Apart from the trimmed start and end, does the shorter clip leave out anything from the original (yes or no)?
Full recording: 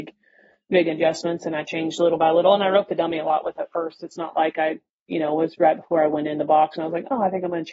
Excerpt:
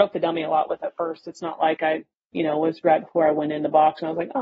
no